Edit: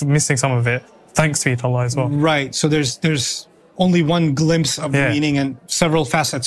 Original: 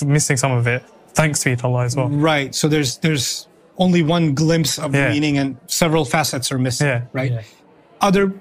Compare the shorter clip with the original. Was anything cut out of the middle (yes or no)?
no